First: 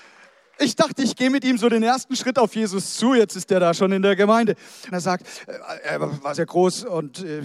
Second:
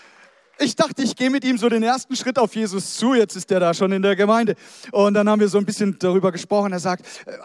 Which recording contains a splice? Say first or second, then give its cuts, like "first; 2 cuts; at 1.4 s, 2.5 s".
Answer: first; 2 cuts; at 4.9 s, 6.3 s